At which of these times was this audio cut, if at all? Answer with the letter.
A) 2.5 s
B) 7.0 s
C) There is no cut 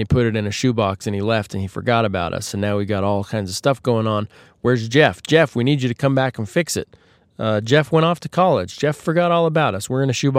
C